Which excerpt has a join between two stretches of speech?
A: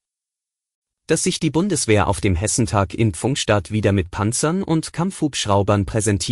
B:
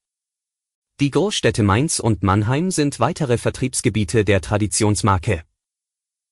A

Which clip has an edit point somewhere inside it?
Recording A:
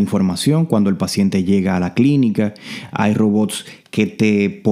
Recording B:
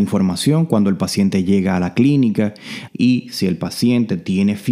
B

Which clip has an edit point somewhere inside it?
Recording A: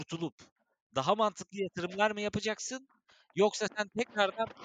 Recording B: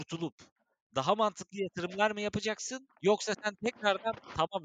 B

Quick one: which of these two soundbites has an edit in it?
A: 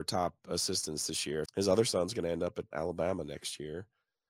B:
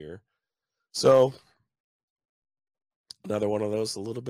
A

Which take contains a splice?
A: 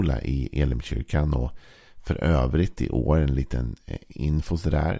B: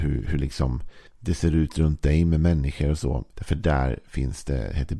B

